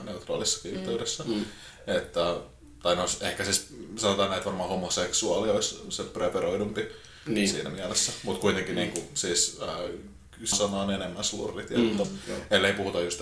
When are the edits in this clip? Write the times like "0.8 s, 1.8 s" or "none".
10.5 s, 12.0 s